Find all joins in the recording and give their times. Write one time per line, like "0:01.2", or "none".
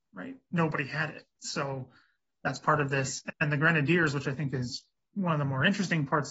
none